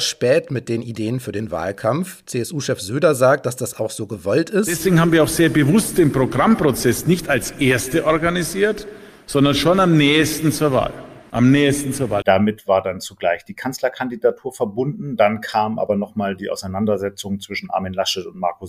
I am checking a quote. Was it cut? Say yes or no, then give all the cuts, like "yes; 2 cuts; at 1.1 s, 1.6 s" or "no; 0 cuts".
yes; 1 cut; at 12.2 s